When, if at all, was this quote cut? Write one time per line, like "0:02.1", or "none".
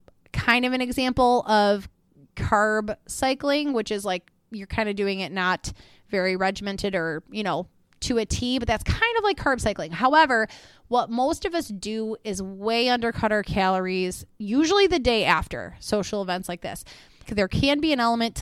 0:17.2